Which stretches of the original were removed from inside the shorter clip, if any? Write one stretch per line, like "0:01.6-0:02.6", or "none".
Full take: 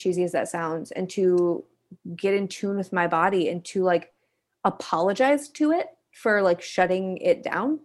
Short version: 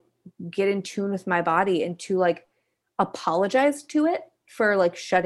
none